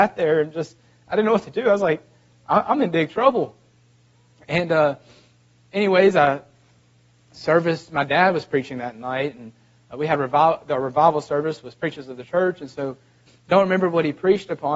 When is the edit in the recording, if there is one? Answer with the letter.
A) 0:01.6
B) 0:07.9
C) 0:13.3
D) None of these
C